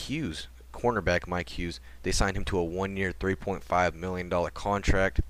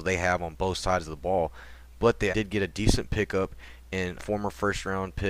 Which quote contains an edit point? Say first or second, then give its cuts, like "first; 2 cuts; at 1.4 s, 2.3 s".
second; 2 cuts; at 2.3 s, 4.2 s